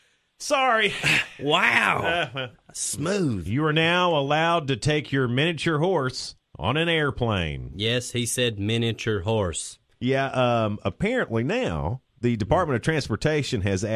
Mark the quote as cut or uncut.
uncut